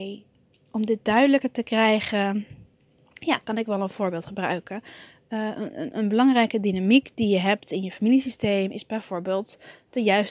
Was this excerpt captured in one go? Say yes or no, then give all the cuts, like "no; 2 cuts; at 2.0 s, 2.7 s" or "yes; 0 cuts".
no; 1 cut; at 5.9 s